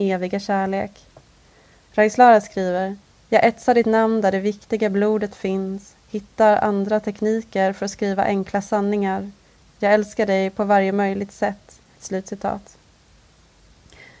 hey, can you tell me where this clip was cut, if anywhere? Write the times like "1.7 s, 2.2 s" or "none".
3.1 s, 11.9 s